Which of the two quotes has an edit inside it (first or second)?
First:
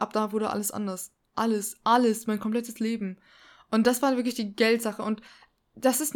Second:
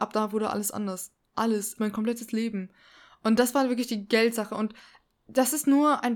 second